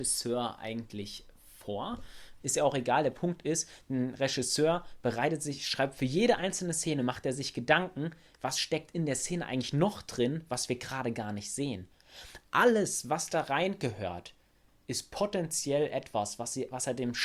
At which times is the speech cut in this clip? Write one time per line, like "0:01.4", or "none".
0:02.4